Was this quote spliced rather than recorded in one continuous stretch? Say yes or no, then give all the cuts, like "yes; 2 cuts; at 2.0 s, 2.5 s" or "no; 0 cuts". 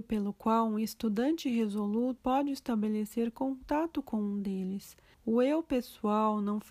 yes; 2 cuts; at 2.2 s, 5.1 s